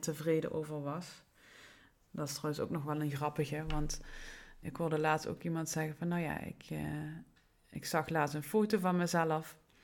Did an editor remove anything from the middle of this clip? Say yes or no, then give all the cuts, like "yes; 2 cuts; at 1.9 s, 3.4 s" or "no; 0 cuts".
yes; 1 cut; at 4.6 s